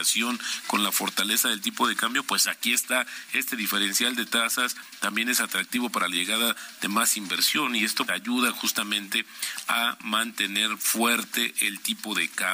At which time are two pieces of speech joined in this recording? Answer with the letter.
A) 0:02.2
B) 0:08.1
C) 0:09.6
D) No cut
B